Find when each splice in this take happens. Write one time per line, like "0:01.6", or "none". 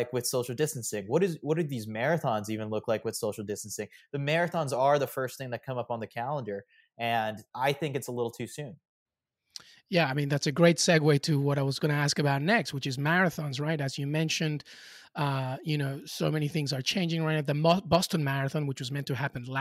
none